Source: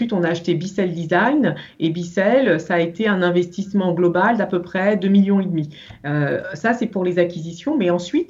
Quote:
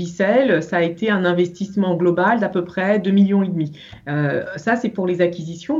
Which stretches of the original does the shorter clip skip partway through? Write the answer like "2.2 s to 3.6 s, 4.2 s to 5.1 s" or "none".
none